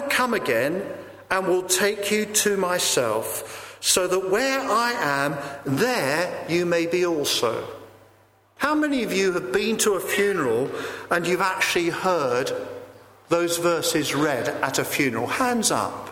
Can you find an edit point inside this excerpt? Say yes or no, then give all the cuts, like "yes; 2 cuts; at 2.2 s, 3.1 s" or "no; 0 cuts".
yes; 1 cut; at 8.6 s